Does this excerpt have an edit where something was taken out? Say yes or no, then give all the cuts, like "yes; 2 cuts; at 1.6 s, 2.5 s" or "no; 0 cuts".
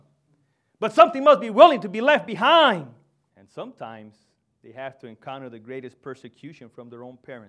yes; 1 cut; at 3.3 s